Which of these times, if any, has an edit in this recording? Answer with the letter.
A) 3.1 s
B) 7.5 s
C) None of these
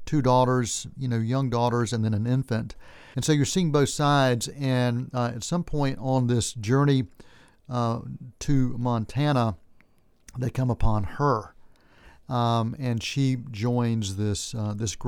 A